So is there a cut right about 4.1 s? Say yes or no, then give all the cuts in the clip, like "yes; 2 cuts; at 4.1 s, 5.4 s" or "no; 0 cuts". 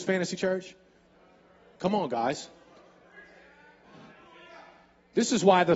no; 0 cuts